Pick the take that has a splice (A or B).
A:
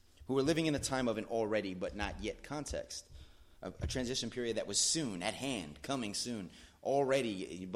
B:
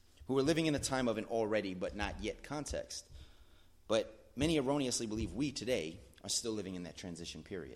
A